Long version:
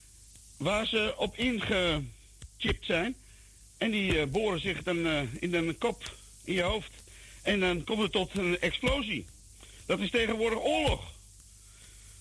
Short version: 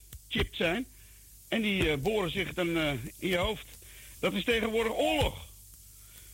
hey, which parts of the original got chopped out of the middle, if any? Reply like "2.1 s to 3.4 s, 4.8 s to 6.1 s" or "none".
5.4 s to 6.4 s, 7.4 s to 9.8 s